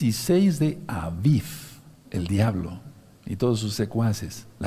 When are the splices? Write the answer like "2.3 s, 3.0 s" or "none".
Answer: 2.0 s